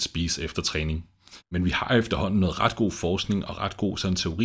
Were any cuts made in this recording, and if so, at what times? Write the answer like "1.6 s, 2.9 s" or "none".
1.4 s